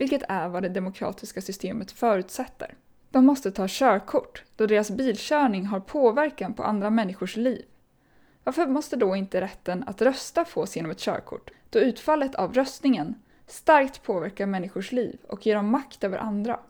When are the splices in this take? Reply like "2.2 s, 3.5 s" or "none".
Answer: 3.0 s, 11.5 s, 13.3 s